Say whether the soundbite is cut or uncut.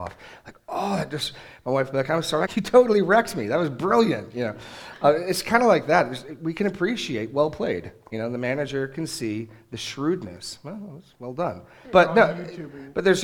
cut